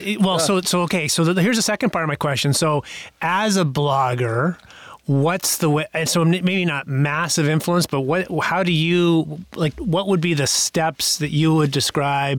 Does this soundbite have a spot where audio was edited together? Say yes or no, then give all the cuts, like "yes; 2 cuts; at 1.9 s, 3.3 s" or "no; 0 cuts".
yes; 1 cut; at 9.7 s